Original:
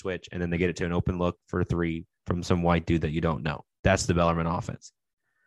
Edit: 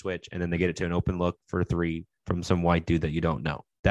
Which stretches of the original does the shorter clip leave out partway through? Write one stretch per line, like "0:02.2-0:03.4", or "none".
none